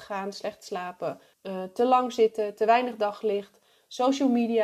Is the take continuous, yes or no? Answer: no